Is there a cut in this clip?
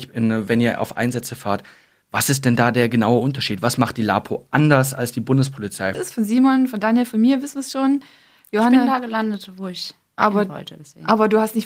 yes; 1 cut; at 5.9 s

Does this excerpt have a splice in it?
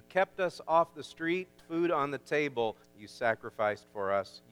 yes; 2 cuts; at 1.6 s, 2.8 s

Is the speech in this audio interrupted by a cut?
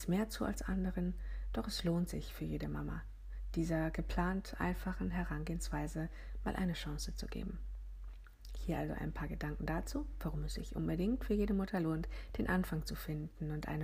no; 0 cuts

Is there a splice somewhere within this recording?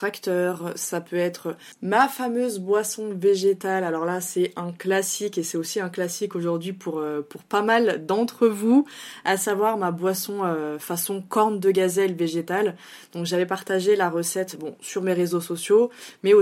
no; 0 cuts

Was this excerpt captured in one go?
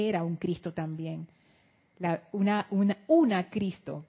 yes; 0 cuts

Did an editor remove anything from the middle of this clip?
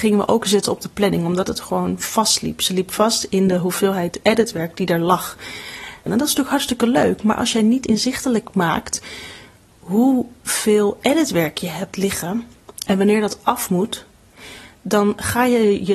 yes; 1 cut; at 6.1 s

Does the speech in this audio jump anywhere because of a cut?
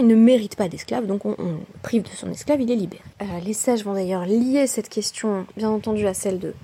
yes; 1 cut; at 3.1 s

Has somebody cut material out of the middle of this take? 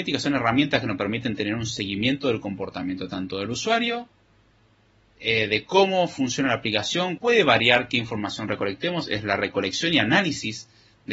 yes; 1 cut; at 7.2 s

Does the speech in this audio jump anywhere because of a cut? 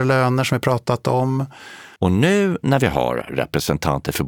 yes; 1 cut; at 2.0 s

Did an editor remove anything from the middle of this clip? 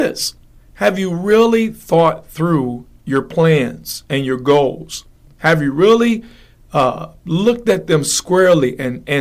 no; 0 cuts

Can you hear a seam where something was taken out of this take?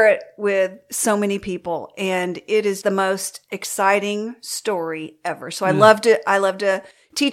yes; 1 cut; at 2.8 s

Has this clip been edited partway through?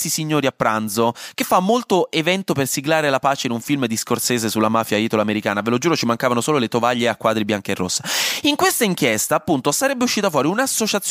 no; 0 cuts

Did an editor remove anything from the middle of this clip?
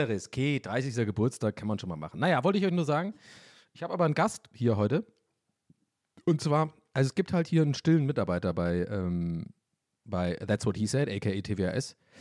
no; 0 cuts

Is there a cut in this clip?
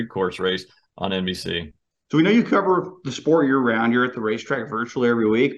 no; 0 cuts

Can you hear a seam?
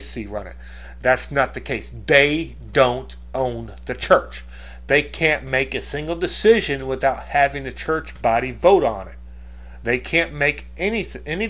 no; 0 cuts

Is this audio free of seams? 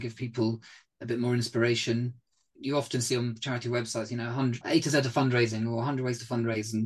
no; 2 cuts; at 2.6 s, 4.6 s

